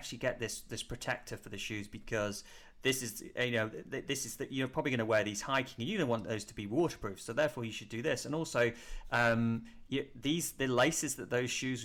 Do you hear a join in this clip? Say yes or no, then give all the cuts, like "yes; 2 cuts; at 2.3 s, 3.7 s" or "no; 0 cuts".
no; 0 cuts